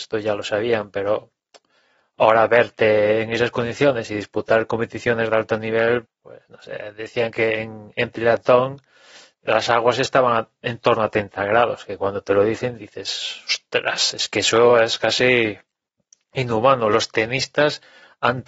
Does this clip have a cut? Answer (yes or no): yes